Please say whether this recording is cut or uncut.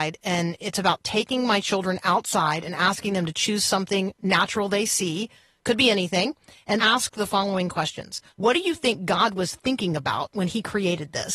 cut